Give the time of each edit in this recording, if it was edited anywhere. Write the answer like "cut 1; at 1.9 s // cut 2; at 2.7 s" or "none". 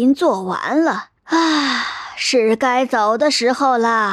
cut 1; at 1.2 s